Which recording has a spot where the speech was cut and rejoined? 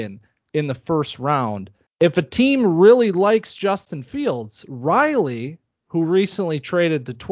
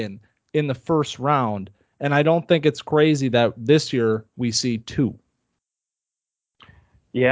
first; 1 cut; at 1.9 s

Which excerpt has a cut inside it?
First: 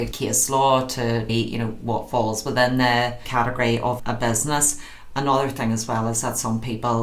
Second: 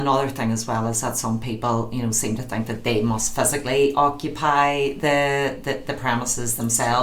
first; 2 cuts; at 1.3 s, 4.0 s

